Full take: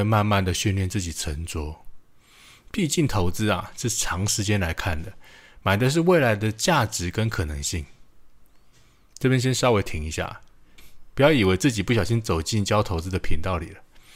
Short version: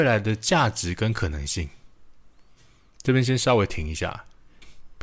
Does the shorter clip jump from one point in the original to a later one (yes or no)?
no